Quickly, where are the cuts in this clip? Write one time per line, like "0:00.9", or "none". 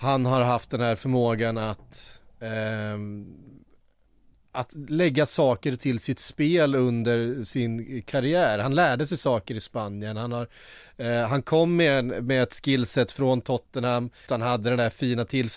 0:14.3